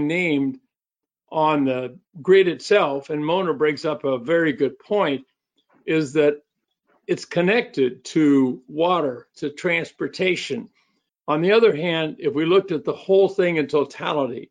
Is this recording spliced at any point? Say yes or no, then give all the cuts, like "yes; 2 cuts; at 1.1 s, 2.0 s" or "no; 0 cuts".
yes; 2 cuts; at 9.3 s, 11.1 s